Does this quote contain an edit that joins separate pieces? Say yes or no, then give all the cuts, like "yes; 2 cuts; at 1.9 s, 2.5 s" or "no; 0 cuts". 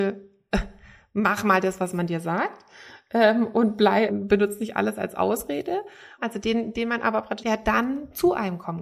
yes; 3 cuts; at 4.1 s, 6.2 s, 7.4 s